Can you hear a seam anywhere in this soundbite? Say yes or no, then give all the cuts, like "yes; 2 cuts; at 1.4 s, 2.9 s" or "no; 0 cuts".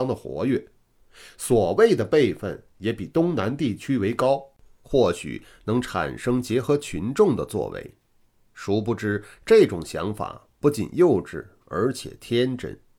yes; 1 cut; at 4.8 s